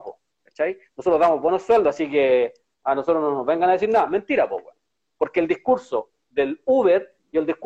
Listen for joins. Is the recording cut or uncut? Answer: uncut